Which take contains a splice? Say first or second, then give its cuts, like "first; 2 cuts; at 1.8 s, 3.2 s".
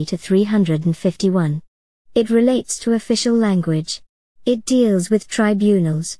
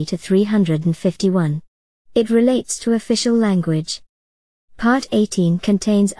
first; 1 cut; at 4.3 s